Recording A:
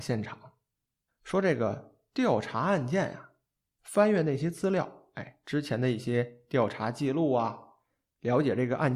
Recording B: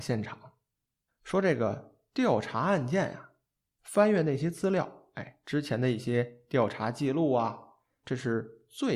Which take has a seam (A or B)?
B